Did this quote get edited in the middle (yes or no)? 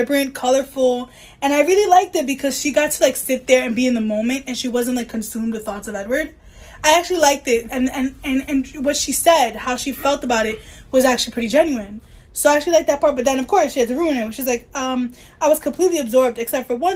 no